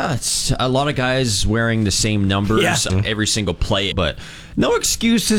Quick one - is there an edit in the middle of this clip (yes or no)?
yes